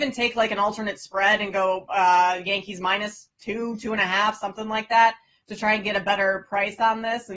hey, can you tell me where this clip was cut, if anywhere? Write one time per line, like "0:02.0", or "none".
none